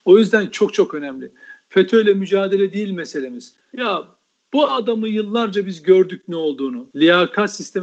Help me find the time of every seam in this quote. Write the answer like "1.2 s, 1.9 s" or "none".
3.6 s, 6.9 s